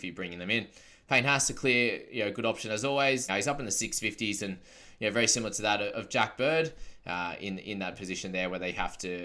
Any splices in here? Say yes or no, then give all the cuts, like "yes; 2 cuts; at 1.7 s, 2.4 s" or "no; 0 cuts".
yes; 1 cut; at 3.3 s